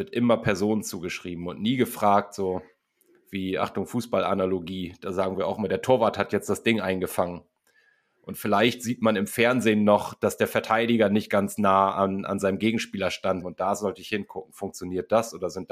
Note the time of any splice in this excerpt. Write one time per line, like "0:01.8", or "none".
0:13.4